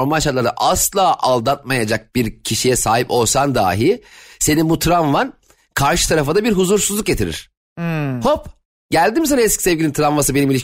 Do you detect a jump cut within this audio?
no; 0 cuts

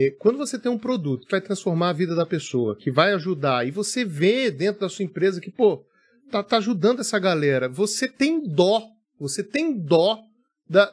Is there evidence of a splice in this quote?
yes; 2 cuts; at 1.3 s, 2.8 s

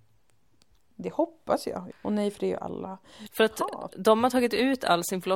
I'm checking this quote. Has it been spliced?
yes; 2 cuts; at 1.9 s, 3.3 s

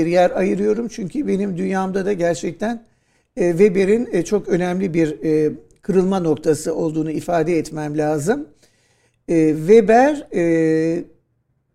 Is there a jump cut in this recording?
no; 0 cuts

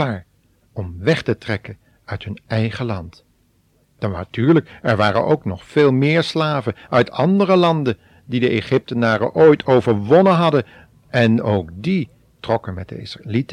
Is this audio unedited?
yes; 0 cuts

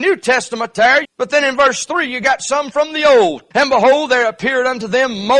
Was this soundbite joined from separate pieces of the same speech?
yes; 2 cuts; at 1.0 s, 3.5 s

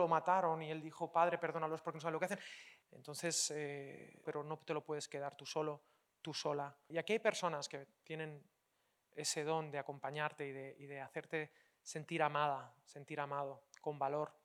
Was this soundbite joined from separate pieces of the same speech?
yes; 3 cuts; at 2.8 s, 4.3 s, 6.9 s

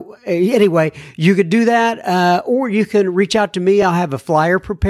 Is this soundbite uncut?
yes; 0 cuts

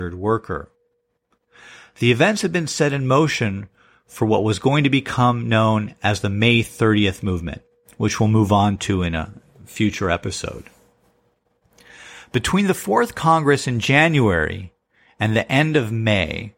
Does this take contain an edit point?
no; 0 cuts

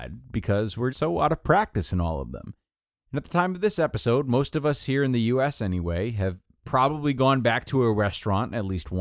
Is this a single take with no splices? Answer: no; 1 cut; at 0.9 s

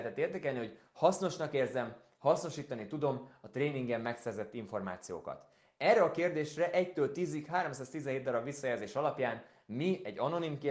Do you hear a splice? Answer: no; 0 cuts

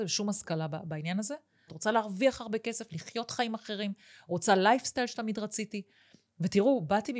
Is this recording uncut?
no; 1 cut; at 1.7 s

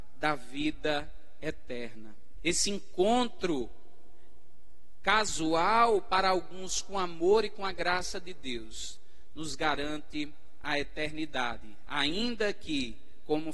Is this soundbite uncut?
no; 1 cut; at 2.4 s

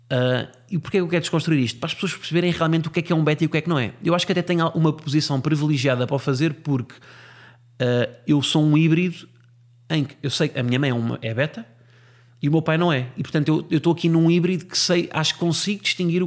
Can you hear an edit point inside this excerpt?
no; 0 cuts

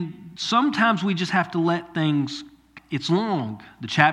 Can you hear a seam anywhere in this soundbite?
yes; 1 cut; at 2.8 s

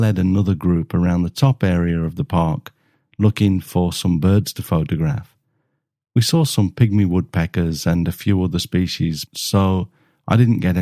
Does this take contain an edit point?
yes; 1 cut; at 9.3 s

